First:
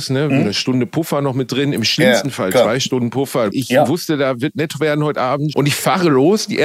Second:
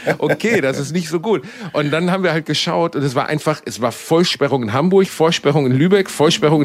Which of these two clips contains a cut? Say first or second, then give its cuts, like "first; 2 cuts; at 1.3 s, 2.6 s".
first; 2 cuts; at 3.5 s, 5.5 s